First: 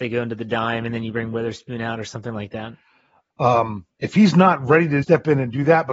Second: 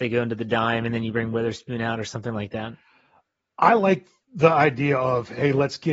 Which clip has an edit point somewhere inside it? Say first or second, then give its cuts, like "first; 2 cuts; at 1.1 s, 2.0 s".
first; 2 cuts; at 3.3 s, 5.0 s